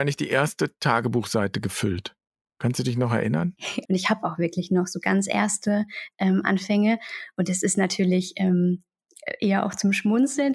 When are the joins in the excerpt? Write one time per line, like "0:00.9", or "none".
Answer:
0:03.9